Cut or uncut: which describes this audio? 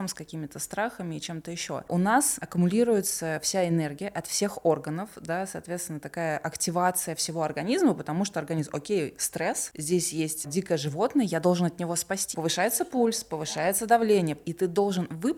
cut